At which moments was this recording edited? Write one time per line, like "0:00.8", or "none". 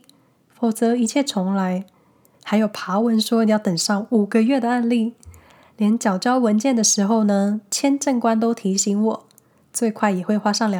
0:02.3